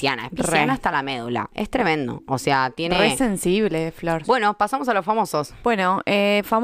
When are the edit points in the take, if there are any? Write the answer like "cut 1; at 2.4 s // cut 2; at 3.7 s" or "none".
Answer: cut 1; at 4.2 s